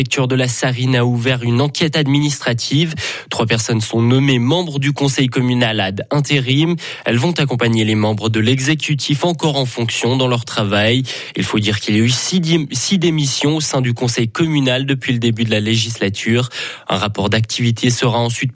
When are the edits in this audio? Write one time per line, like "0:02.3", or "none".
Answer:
none